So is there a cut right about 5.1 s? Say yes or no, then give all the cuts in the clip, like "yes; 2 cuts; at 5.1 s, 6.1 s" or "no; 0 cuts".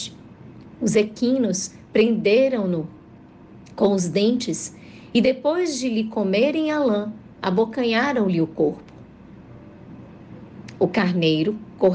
no; 0 cuts